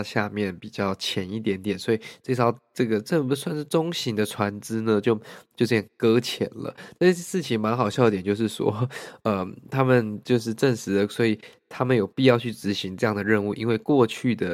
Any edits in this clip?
no; 0 cuts

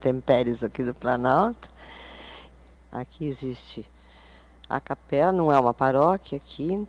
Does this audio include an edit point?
yes; 1 cut; at 2.7 s

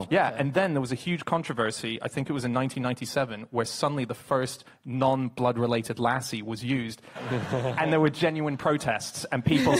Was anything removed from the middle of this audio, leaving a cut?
yes; 1 cut; at 7.2 s

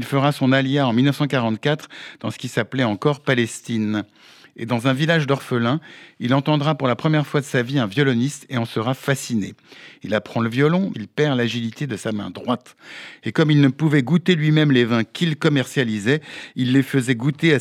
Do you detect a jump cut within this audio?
yes; 2 cuts; at 10.9 s, 13.2 s

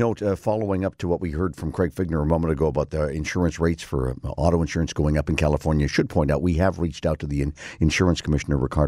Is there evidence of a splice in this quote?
no; 0 cuts

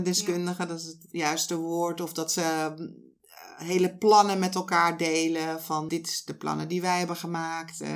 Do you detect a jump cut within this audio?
yes; 1 cut; at 5.9 s

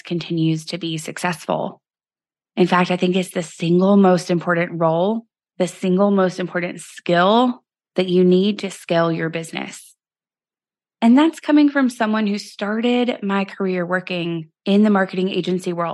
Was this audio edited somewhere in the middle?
no; 0 cuts

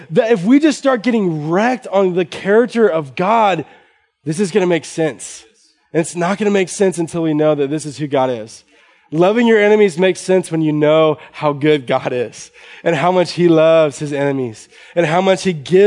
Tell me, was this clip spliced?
no; 0 cuts

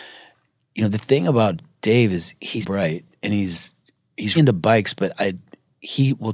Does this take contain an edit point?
yes; 2 cuts; at 2.6 s, 4.4 s

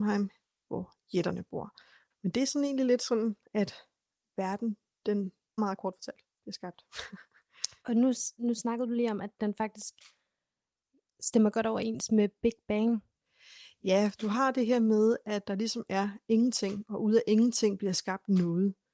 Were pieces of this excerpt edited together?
yes; 2 cuts; at 2.1 s, 5.6 s

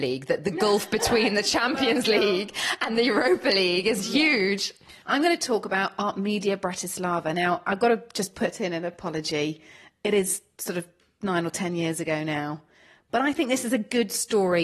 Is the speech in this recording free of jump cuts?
yes; 0 cuts

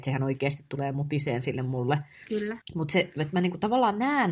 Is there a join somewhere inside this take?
yes; 1 cut; at 2.6 s

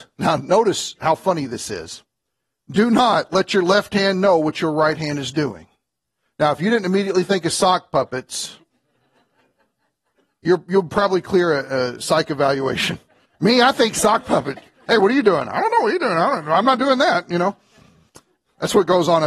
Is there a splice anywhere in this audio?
no; 0 cuts

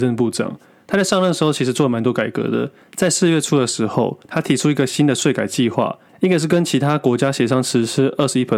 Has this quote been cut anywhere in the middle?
no; 0 cuts

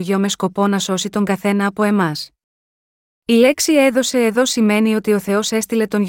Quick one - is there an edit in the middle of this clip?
no; 0 cuts

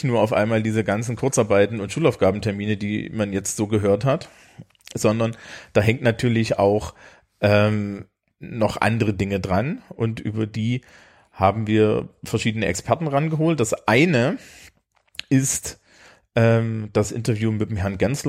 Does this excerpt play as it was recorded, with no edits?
yes; 0 cuts

